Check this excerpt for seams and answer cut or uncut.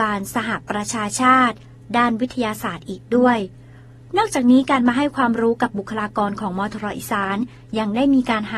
uncut